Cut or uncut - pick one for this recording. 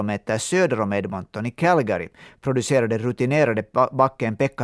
uncut